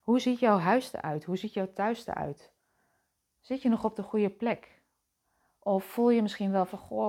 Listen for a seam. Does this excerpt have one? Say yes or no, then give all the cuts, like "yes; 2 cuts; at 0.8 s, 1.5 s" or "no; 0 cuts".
yes; 1 cut; at 3.3 s